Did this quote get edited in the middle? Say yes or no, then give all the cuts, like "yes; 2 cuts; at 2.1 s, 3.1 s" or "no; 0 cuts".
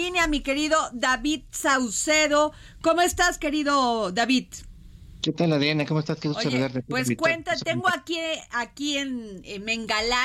no; 0 cuts